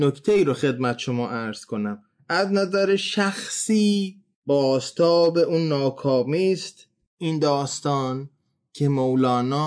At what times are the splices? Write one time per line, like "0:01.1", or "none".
none